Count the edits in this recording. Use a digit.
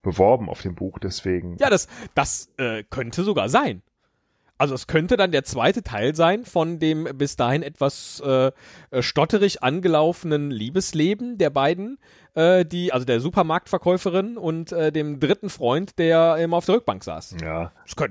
1